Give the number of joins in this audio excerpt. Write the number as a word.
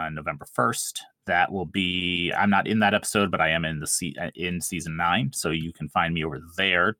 zero